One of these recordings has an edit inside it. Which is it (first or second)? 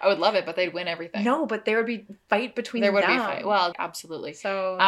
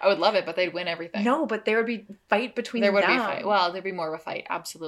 first